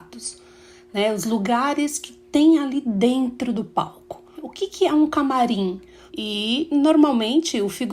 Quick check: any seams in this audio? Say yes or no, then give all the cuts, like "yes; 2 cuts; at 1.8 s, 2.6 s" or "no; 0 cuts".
yes; 2 cuts; at 4.3 s, 6.1 s